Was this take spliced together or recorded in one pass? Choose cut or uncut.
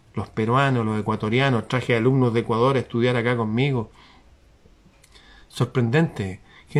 uncut